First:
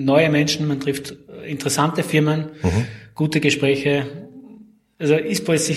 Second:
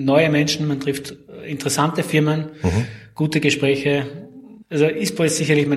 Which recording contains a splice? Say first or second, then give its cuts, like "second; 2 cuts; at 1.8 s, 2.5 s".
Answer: second; 1 cut; at 4.6 s